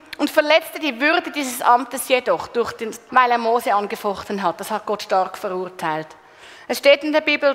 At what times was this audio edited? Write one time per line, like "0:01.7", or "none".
0:03.1